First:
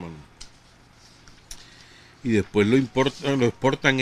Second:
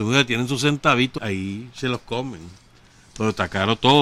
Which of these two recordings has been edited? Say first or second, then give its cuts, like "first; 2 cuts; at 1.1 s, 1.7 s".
second; 1 cut; at 1.2 s